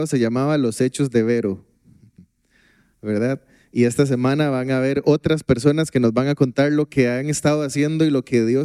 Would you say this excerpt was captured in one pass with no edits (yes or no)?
yes